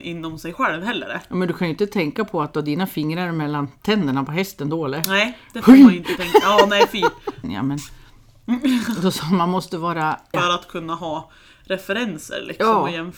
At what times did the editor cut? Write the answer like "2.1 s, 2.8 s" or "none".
7.4 s, 10.3 s